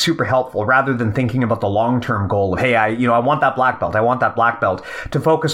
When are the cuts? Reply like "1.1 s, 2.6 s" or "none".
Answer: none